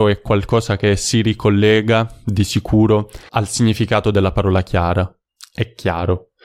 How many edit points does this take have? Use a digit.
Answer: 1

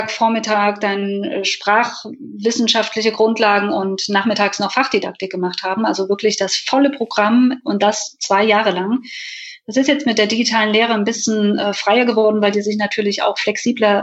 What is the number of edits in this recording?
0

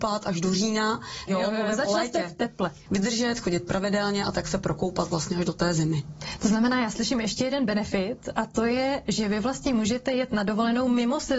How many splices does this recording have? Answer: 2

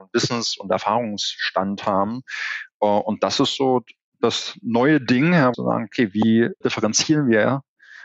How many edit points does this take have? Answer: 2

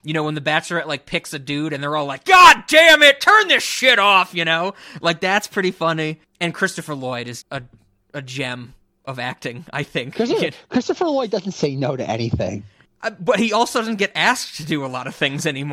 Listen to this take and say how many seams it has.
1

